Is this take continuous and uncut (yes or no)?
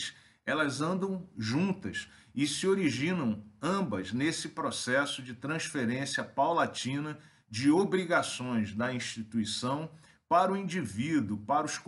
yes